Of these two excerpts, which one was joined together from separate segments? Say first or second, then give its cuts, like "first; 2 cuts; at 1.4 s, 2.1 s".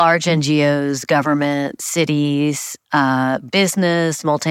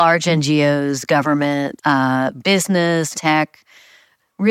second; 2 cuts; at 1.8 s, 3.1 s